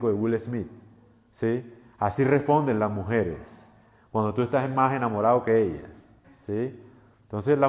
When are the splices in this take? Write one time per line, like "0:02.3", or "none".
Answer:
0:06.2